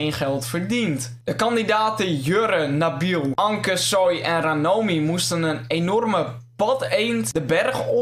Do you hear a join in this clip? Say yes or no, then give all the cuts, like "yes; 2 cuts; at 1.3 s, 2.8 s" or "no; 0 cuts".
no; 0 cuts